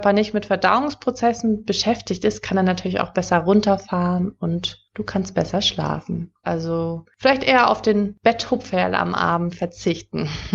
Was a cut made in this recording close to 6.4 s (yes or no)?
yes